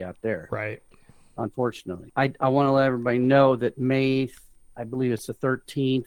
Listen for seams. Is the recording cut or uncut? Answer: cut